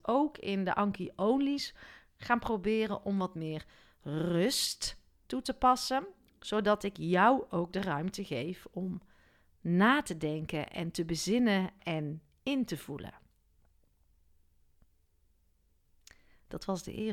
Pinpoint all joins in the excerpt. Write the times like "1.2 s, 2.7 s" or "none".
none